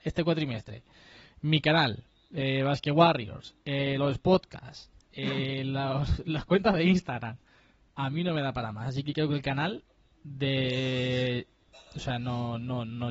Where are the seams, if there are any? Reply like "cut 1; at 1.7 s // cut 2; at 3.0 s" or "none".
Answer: none